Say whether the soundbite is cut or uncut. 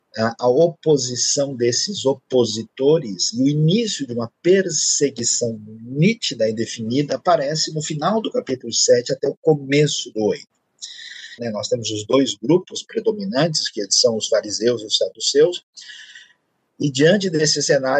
cut